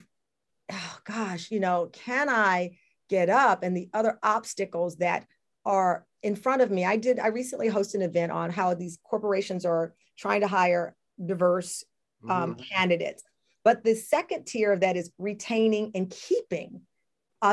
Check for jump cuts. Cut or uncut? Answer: uncut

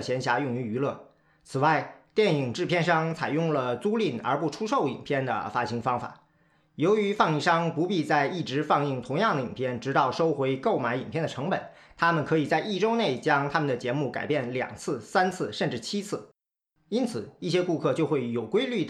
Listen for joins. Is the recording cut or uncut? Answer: uncut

